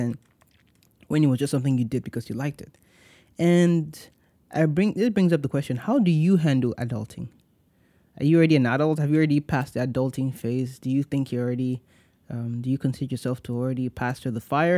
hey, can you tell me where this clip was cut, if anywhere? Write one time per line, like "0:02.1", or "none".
none